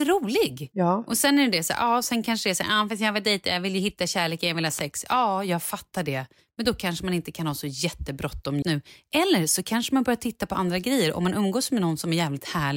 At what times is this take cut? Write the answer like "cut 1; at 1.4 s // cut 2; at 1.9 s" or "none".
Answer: cut 1; at 8.6 s

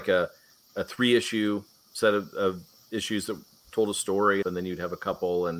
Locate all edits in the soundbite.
cut 1; at 4.4 s

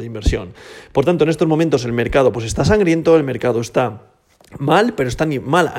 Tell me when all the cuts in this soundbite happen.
none

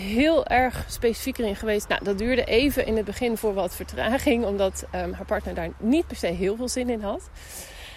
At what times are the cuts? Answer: cut 1; at 1.8 s

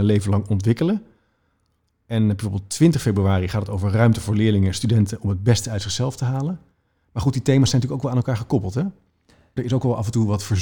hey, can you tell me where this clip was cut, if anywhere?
cut 1; at 9.6 s

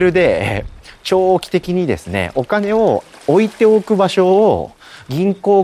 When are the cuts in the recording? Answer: none

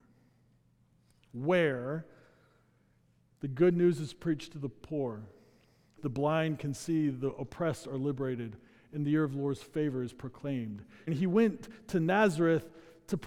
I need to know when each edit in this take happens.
cut 1; at 6.0 s // cut 2; at 11.1 s

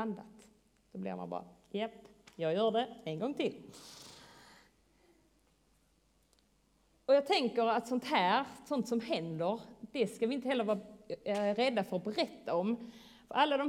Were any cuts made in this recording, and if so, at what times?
none

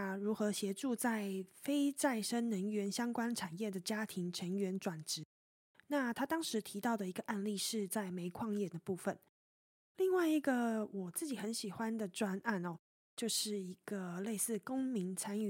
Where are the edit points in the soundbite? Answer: none

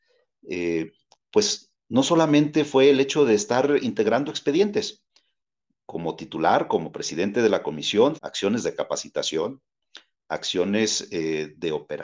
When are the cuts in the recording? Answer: cut 1; at 8.2 s

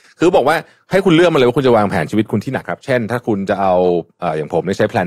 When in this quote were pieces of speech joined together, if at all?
cut 1; at 2.6 s

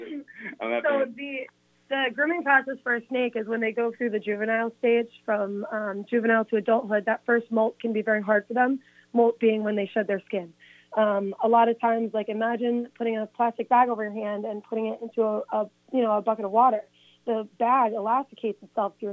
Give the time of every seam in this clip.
none

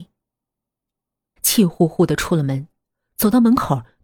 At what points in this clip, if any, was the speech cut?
cut 1; at 1.4 s

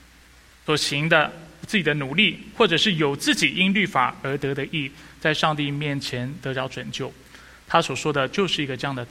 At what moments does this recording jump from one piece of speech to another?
none

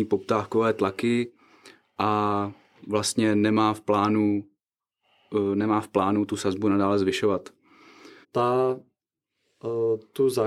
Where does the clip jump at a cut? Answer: cut 1; at 8.2 s

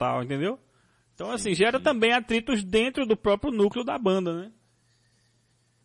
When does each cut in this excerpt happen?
none

